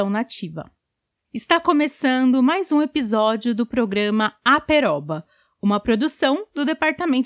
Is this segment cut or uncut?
cut